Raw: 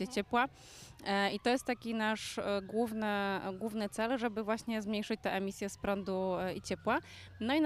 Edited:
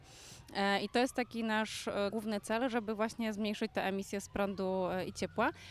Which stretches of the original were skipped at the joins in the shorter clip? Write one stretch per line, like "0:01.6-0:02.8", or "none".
0:02.6-0:03.6